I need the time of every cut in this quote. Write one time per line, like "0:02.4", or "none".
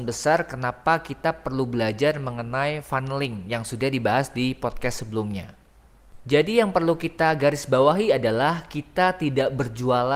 0:06.2

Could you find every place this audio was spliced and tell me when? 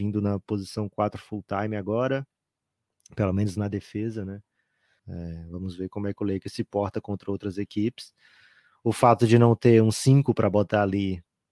0:05.0

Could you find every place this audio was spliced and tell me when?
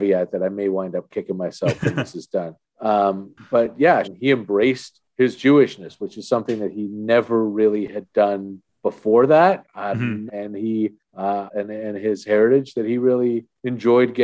0:04.0
0:10.3
0:11.5

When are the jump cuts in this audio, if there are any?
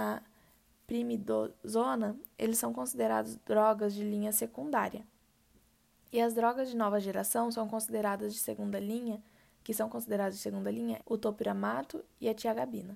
0:11.0

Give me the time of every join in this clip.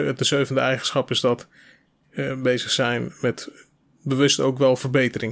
none

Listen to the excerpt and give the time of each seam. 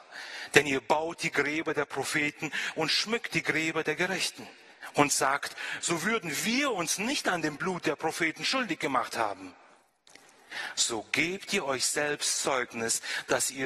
0:05.8

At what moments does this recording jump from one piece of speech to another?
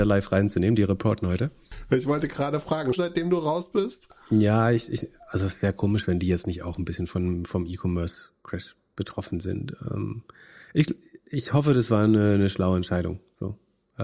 0:03.0

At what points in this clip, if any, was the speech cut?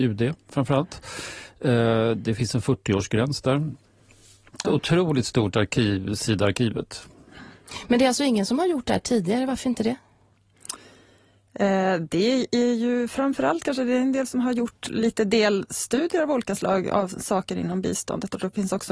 0:04.6

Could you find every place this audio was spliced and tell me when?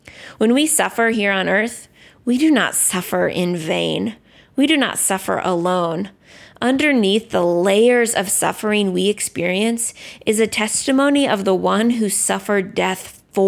none

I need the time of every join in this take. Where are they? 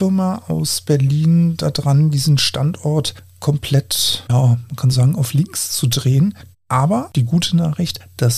0:06.5

